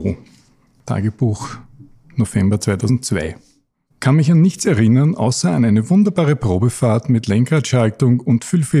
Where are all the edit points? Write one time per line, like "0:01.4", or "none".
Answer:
0:03.9